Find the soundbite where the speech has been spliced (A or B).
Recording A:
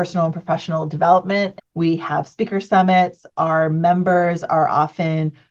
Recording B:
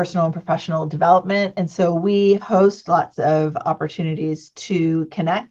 A